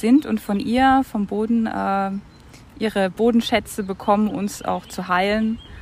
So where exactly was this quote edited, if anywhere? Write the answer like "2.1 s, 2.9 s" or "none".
4.3 s